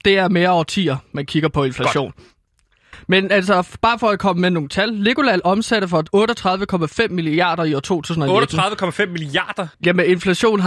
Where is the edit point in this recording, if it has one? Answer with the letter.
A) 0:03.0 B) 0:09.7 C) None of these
B